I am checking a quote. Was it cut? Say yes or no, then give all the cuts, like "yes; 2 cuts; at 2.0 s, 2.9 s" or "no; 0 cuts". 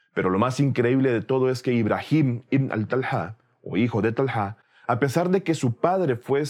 no; 0 cuts